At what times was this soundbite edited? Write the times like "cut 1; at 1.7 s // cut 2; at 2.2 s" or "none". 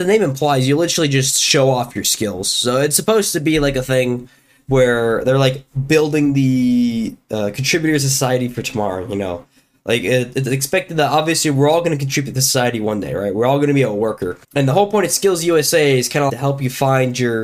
cut 1; at 14.4 s // cut 2; at 16.3 s